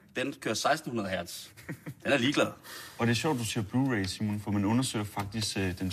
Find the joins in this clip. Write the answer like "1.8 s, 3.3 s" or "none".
none